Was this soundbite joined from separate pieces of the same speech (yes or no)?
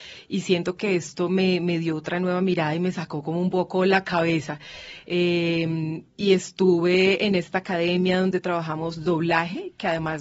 no